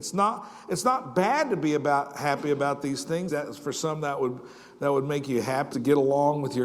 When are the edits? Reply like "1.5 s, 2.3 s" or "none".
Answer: 3.3 s, 5.7 s